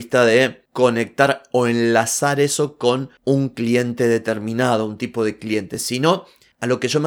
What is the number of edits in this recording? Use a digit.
0